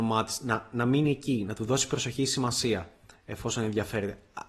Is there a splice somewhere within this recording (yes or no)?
no